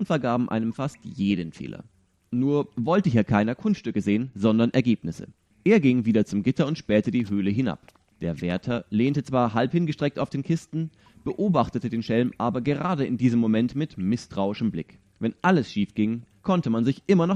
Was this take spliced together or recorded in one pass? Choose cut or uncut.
cut